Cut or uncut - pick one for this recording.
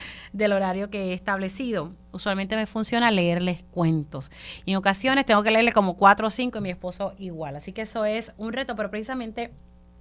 uncut